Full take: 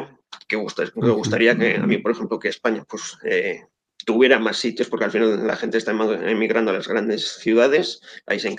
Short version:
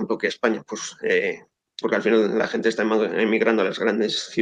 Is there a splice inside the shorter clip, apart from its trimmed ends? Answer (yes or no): yes